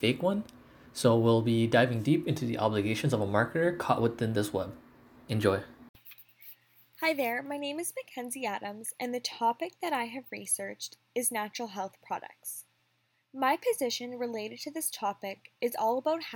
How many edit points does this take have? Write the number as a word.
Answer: zero